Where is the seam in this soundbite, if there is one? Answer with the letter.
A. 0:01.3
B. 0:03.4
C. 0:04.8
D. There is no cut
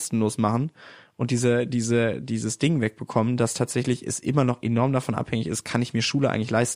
D